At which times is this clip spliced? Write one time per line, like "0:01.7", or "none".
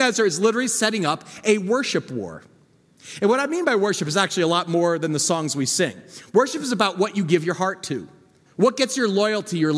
0:08.5